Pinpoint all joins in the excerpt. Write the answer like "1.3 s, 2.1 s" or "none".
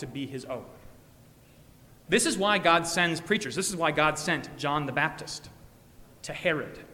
2.0 s